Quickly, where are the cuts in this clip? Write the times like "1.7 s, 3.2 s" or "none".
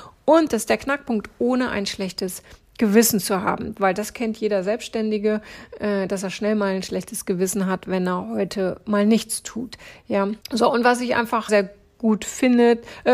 10.4 s, 11.5 s